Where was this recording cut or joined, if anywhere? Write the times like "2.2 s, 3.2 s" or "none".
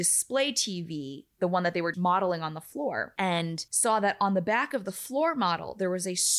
1.9 s